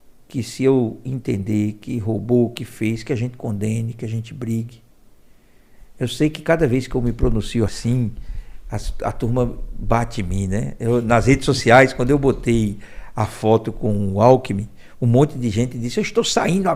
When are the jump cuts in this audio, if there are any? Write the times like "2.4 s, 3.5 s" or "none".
none